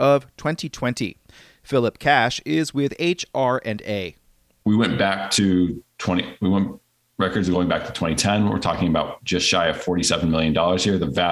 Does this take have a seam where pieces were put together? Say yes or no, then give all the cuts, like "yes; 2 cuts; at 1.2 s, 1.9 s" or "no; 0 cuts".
no; 0 cuts